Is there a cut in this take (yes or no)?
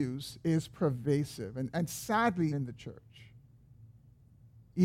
yes